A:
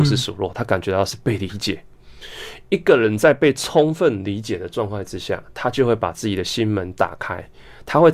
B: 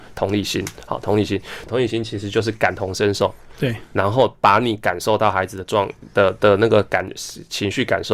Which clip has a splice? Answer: B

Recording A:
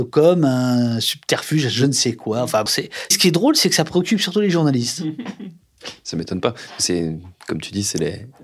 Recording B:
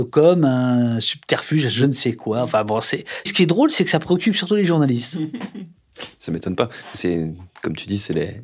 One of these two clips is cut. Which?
A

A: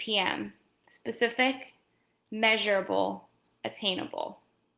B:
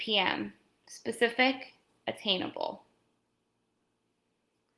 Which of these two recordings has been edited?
B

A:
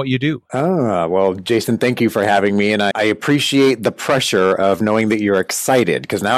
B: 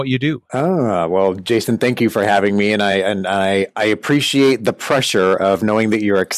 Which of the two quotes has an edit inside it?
A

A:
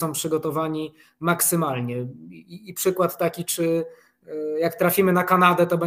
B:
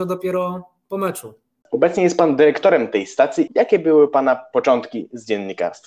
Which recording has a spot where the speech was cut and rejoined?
B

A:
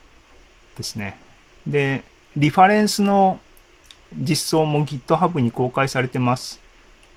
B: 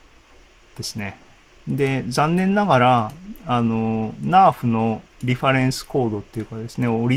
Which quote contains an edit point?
B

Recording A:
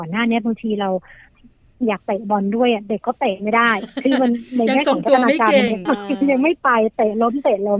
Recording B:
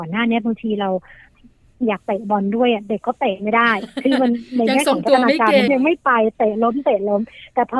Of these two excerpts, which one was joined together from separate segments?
B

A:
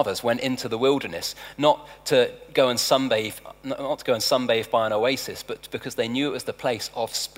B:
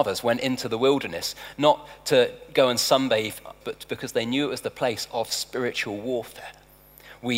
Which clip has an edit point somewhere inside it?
B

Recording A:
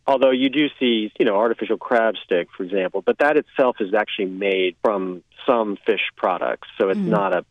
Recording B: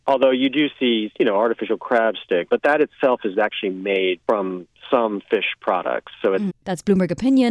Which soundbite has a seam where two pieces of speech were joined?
B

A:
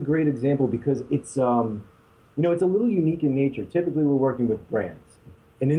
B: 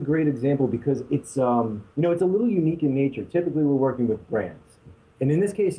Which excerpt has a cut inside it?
B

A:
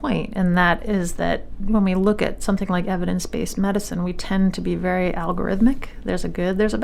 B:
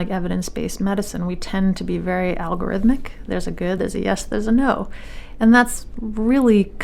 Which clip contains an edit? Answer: B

